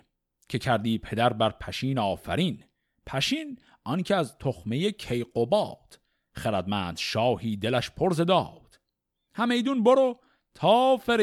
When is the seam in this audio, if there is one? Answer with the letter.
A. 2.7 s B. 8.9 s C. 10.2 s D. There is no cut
D